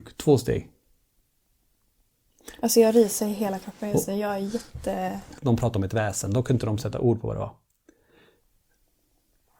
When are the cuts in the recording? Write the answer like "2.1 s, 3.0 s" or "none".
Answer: 5.4 s

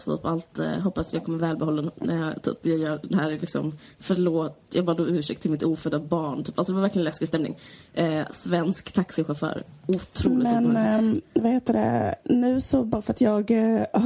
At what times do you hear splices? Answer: none

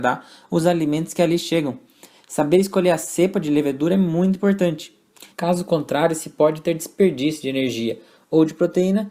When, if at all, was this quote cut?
5.3 s

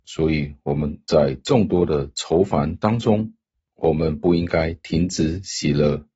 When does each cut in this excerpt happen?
none

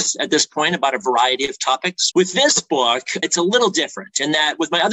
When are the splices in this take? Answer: 2.1 s, 3.2 s

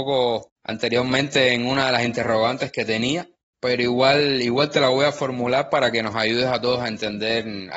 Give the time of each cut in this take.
none

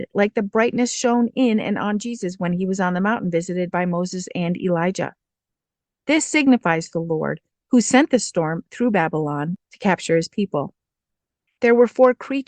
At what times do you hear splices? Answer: none

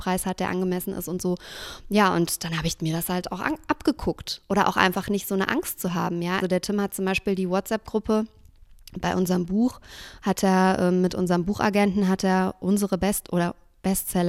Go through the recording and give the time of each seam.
6.4 s

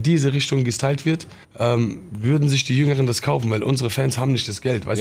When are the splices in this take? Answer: 1.4 s

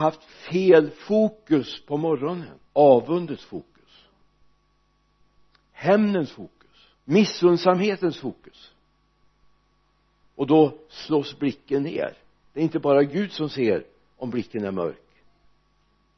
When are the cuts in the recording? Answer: 2.7 s, 7.0 s

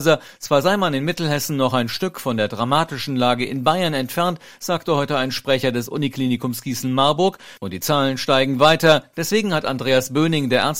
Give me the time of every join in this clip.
7.6 s

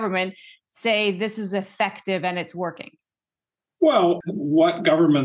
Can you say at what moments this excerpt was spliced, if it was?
4.2 s

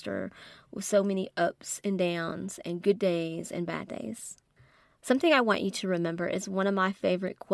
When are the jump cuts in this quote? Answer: none

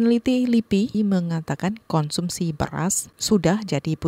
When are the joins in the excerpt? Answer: 0.9 s

